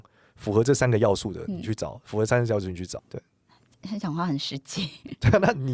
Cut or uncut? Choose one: cut